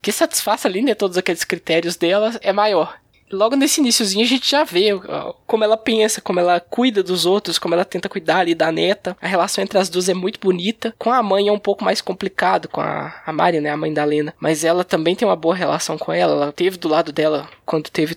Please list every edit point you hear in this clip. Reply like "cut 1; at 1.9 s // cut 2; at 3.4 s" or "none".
none

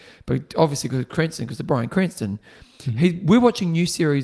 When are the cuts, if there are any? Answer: none

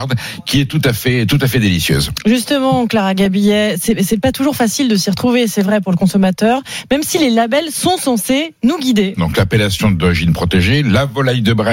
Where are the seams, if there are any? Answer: cut 1; at 9.2 s

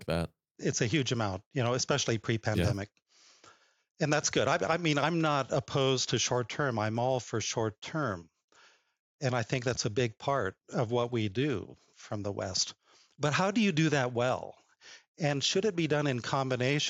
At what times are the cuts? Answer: none

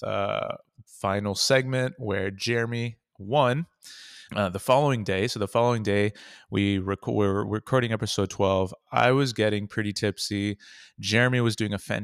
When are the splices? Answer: cut 1; at 4.3 s

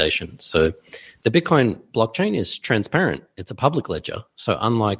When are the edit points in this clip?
none

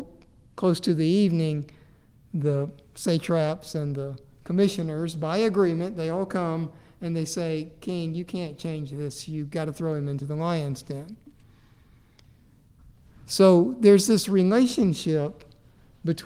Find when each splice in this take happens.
none

